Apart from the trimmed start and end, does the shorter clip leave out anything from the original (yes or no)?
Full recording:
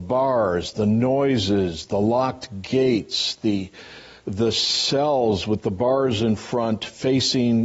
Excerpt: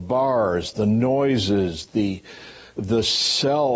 yes